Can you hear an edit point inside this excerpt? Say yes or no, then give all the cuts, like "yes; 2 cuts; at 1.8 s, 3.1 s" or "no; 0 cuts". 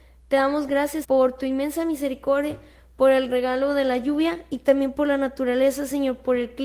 yes; 1 cut; at 1.0 s